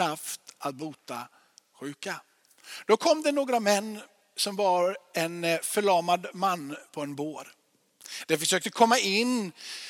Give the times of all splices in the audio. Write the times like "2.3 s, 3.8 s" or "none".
none